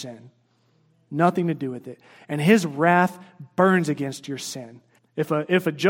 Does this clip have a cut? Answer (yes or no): yes